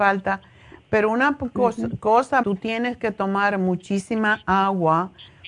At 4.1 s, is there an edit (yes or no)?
no